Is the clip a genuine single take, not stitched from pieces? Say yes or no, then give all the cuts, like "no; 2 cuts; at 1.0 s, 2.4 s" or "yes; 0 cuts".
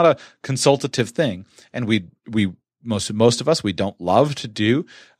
yes; 0 cuts